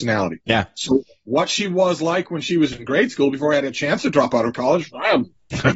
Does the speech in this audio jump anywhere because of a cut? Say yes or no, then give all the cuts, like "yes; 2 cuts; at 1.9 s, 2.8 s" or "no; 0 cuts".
no; 0 cuts